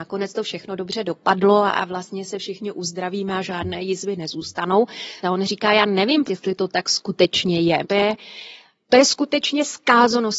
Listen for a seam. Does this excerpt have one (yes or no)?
yes